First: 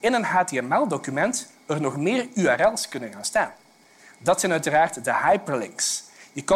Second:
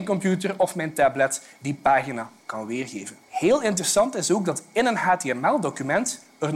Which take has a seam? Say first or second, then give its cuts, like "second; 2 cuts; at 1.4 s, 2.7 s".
second; 1 cut; at 3.2 s